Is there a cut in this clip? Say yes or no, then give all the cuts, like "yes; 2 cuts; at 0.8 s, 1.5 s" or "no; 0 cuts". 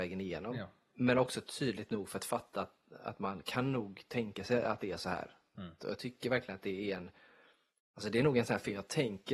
yes; 1 cut; at 5.8 s